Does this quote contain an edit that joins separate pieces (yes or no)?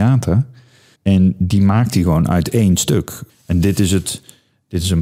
yes